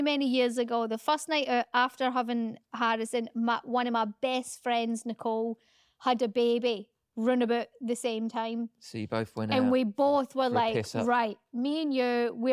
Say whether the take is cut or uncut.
uncut